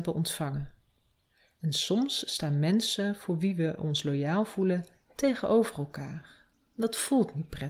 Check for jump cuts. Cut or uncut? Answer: uncut